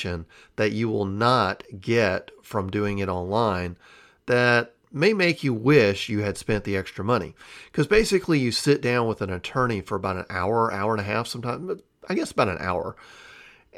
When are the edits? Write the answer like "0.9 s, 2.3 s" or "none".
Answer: none